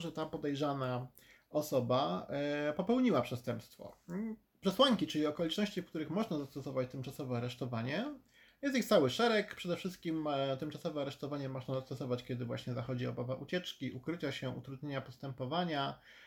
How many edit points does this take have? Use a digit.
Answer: 1